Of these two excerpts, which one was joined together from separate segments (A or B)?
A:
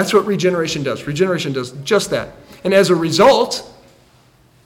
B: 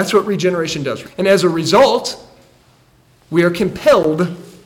B